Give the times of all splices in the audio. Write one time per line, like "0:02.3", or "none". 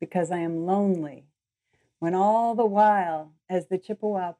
none